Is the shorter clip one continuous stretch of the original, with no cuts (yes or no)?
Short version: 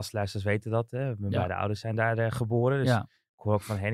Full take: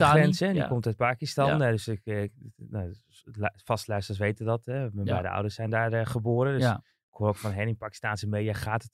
yes